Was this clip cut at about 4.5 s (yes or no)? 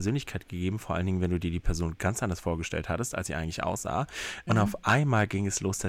yes